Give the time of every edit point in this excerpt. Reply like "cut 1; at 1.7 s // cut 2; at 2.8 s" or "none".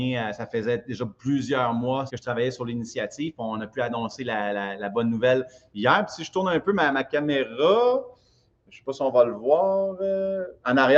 cut 1; at 2.1 s